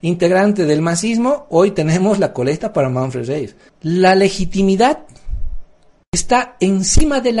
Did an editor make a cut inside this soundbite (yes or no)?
yes